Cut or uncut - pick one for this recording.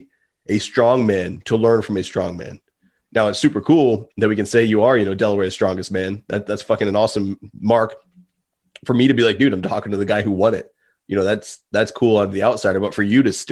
uncut